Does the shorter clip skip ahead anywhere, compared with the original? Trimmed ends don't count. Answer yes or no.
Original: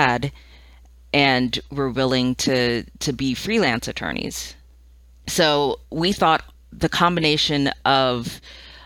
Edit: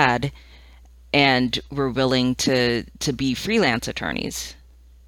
no